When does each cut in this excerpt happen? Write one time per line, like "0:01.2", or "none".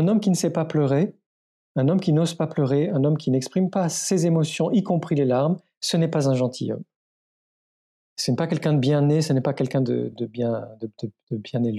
0:10.1